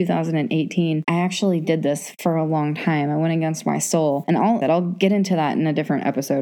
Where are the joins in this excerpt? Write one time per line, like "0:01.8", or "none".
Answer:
0:01.0
0:04.6